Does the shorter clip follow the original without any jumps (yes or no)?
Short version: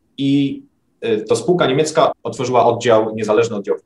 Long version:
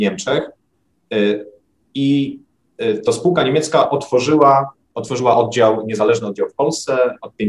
no